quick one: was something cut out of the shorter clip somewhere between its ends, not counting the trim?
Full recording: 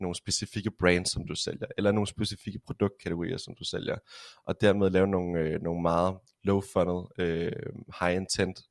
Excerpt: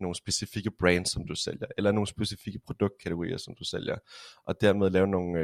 no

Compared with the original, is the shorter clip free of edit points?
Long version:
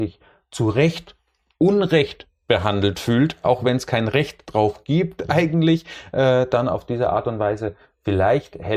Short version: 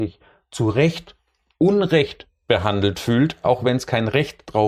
yes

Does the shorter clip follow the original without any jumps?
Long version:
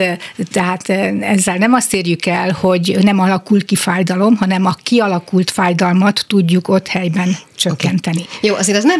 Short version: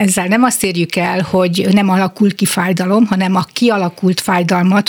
yes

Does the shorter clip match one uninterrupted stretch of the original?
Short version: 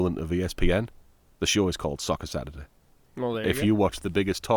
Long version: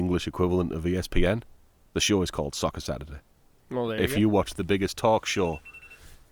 yes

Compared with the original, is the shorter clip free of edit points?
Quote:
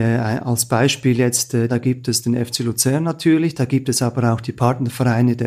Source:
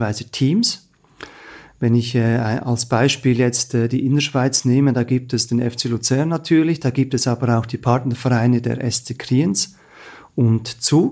no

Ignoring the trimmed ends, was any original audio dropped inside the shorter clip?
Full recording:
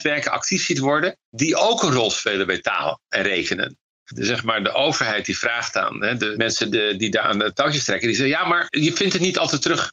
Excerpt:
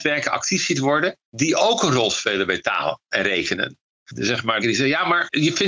yes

